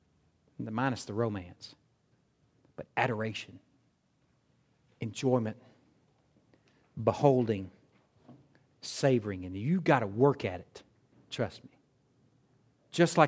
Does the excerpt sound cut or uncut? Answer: uncut